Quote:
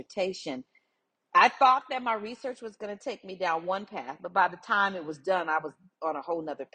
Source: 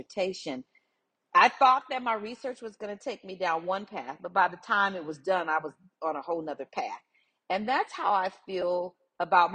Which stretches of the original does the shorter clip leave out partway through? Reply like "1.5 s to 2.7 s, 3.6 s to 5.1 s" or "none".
none